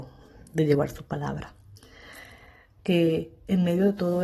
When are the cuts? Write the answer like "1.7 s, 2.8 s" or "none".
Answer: 2.8 s